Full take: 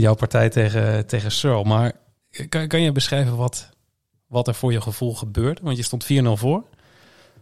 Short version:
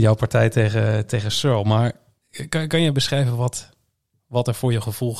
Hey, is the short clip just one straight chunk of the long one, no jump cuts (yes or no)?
yes